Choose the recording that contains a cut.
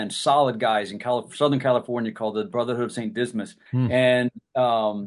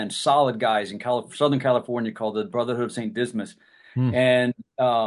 first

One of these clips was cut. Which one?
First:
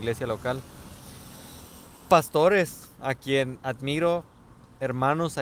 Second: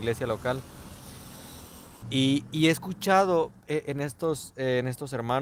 second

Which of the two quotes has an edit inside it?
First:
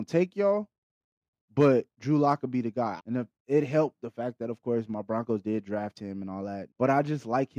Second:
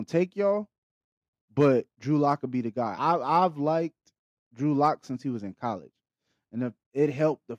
first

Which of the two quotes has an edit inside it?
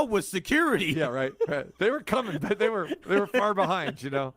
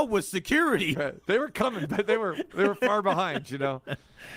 second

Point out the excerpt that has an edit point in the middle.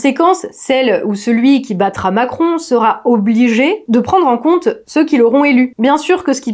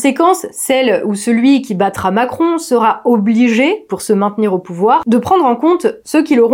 first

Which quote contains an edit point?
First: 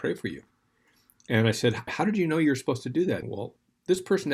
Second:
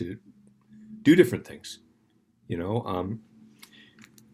first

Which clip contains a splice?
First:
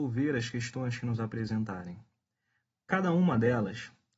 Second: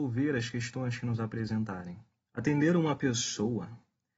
second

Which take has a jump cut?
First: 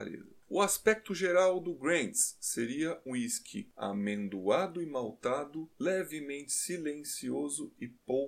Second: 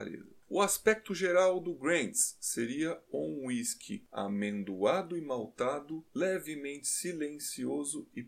first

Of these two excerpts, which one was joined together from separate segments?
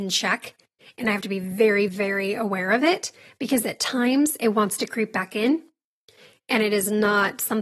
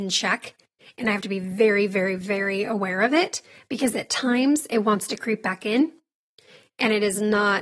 first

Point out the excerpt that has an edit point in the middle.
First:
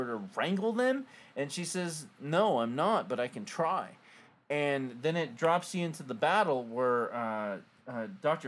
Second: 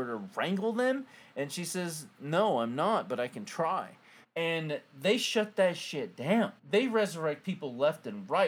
second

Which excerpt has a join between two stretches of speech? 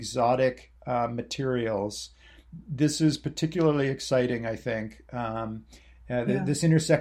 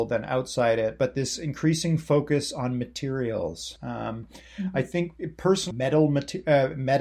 second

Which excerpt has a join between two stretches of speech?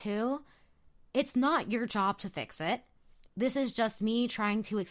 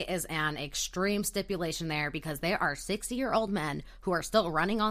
first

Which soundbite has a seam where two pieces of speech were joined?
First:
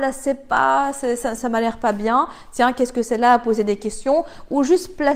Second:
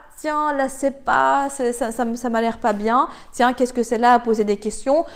first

